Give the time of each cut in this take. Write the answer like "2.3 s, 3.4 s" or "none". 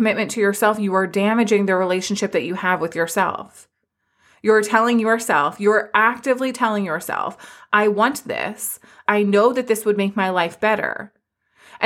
9.0 s